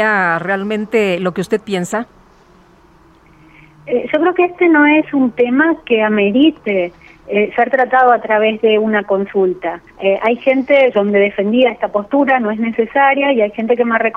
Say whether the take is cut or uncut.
cut